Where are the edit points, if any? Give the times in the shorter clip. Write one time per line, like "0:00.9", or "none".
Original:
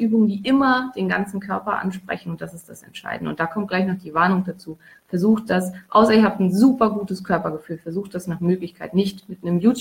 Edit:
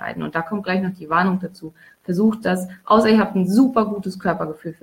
none